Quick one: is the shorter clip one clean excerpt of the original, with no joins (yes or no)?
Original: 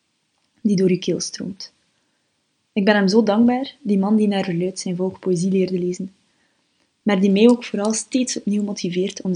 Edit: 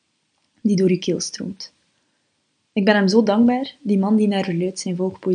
yes